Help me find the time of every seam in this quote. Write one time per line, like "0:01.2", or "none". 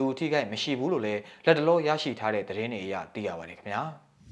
none